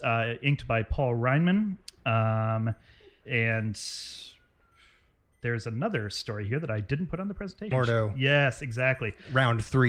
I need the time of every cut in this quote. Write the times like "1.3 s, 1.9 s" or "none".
3.2 s, 7.7 s